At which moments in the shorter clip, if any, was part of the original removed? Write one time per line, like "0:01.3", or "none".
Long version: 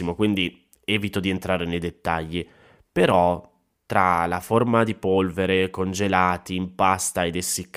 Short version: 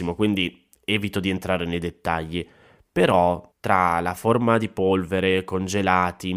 0:03.5